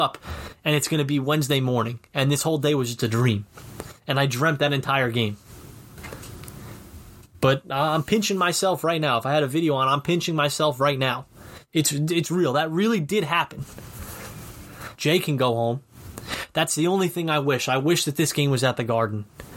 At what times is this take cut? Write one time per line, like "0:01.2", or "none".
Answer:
0:15.0